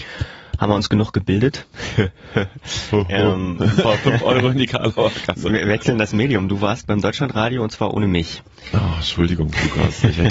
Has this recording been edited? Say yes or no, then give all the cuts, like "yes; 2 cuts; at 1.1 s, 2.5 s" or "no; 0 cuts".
yes; 1 cut; at 3.8 s